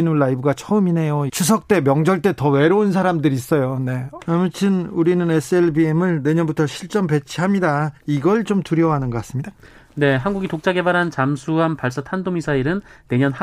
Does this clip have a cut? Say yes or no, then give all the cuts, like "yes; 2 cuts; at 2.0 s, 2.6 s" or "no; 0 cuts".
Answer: yes; 2 cuts; at 1.3 s, 4.2 s